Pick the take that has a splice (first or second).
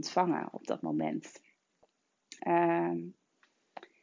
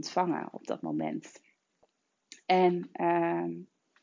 first